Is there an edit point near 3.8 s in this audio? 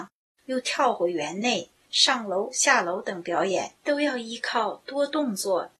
no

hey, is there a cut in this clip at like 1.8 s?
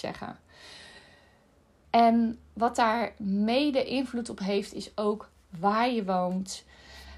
yes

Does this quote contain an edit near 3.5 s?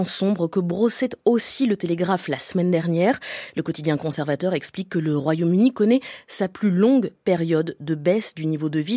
no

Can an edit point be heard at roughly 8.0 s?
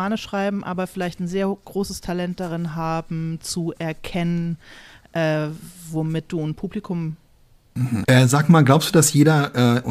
yes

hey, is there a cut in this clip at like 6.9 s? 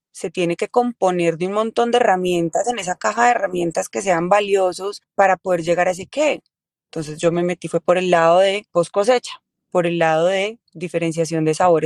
yes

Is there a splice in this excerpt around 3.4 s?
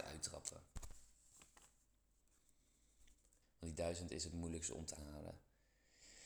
yes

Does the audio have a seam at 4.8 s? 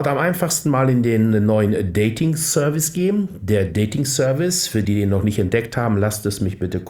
yes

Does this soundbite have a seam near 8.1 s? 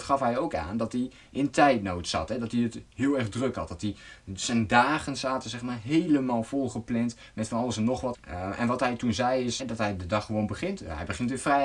yes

